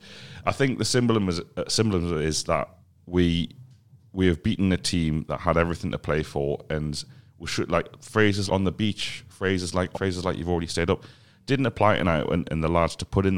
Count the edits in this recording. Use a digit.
3